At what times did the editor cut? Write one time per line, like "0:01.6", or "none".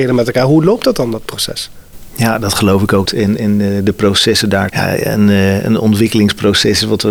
0:03.1
0:04.7